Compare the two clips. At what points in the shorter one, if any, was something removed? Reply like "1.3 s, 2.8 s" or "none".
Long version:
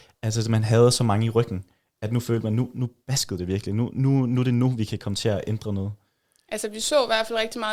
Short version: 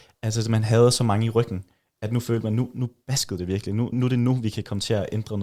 3.9 s